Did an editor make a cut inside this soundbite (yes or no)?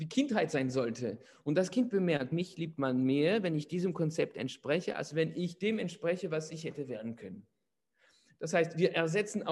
no